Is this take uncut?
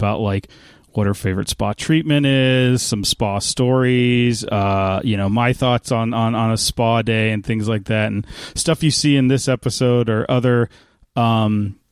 yes; 0 cuts

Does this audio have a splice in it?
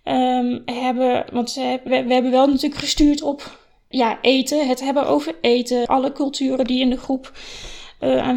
yes; 3 cuts; at 1.9 s, 3.9 s, 5.9 s

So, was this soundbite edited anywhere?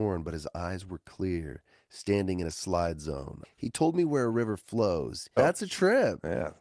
yes; 2 cuts; at 3.4 s, 5.4 s

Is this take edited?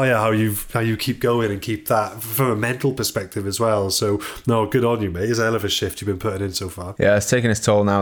no; 0 cuts

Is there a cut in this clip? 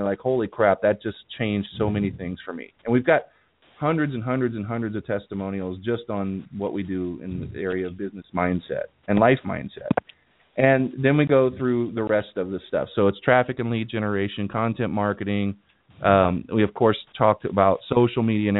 no; 0 cuts

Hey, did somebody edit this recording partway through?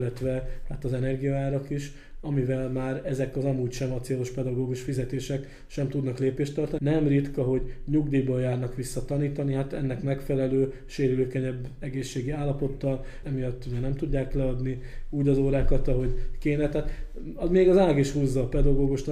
yes; 2 cuts; at 6.8 s, 13.2 s

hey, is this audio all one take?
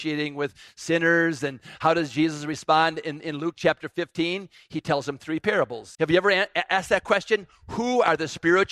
no; 1 cut; at 6.0 s

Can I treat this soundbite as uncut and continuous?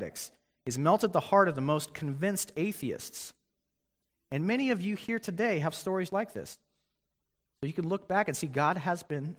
no; 1 cut; at 6.1 s

